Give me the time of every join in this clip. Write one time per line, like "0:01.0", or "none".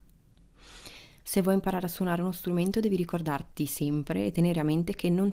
0:01.2